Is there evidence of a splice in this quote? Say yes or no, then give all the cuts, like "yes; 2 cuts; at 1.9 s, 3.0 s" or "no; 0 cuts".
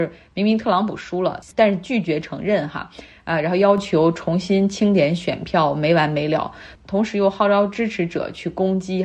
no; 0 cuts